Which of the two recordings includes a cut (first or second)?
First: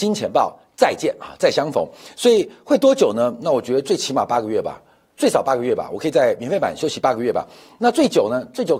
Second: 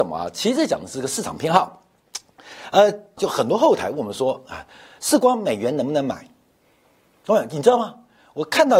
second